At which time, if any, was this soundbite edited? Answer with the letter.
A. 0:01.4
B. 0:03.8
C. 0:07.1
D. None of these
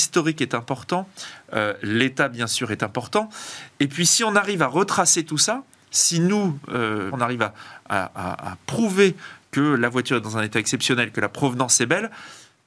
C